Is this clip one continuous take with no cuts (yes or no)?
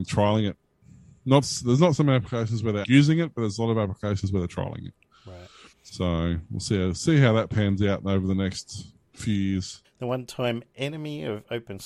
no